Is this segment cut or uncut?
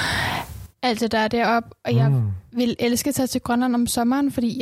uncut